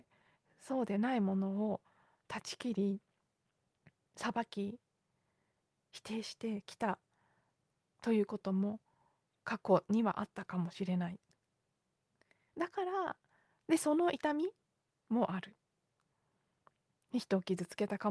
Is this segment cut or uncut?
uncut